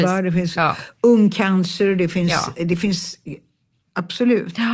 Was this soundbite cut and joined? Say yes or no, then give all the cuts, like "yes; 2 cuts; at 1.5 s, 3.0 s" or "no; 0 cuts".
no; 0 cuts